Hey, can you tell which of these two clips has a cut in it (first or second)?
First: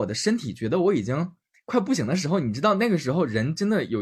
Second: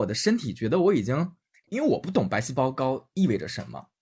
second